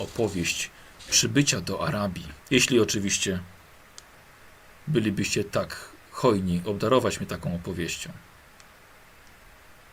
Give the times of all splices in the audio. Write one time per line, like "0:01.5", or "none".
0:02.4